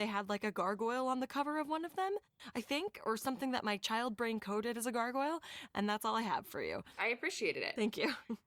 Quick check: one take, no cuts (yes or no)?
no